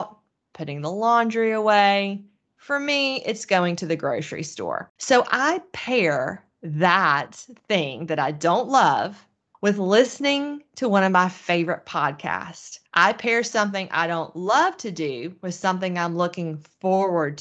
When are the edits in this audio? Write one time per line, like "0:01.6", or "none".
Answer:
0:09.5
0:12.9